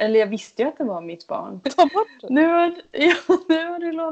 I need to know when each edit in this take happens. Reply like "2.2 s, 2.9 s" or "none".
1.6 s